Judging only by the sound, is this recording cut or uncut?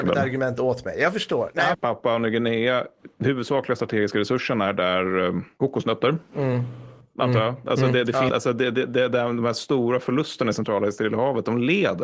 cut